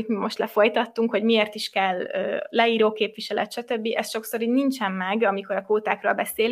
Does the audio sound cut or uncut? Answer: uncut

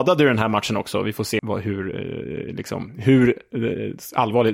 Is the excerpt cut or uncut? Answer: cut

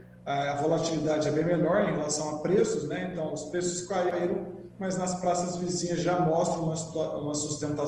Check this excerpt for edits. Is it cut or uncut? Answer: uncut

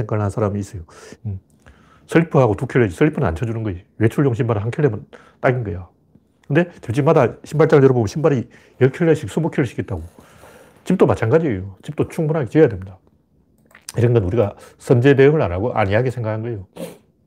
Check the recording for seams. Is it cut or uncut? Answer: cut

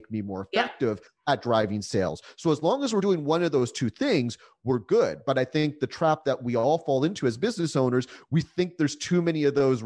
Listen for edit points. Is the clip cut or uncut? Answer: uncut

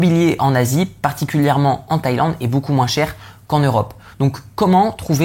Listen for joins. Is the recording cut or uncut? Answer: cut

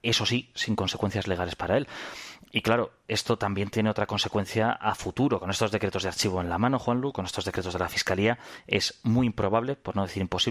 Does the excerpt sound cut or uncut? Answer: uncut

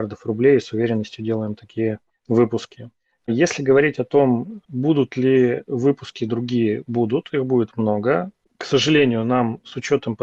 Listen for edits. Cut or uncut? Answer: uncut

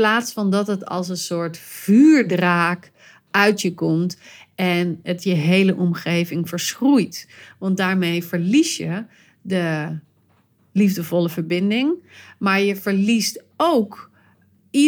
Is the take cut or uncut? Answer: uncut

